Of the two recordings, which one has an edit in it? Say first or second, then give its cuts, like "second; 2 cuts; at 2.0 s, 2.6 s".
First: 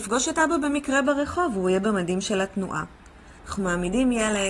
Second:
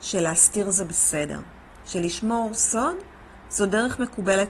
first; 1 cut; at 3.4 s